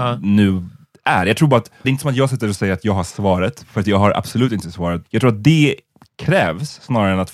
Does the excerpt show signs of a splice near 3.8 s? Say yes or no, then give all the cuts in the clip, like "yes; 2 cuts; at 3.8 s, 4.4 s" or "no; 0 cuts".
no; 2 cuts; at 1.8 s, 5.0 s